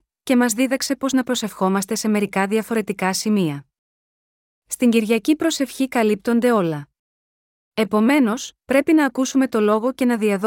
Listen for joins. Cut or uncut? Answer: cut